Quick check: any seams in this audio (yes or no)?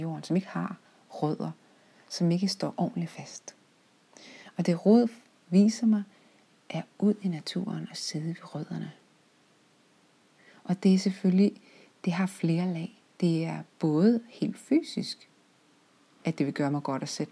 no